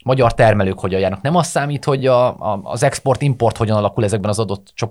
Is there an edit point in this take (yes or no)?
no